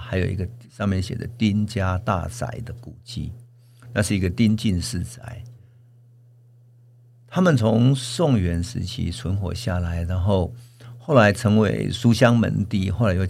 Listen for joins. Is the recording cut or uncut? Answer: uncut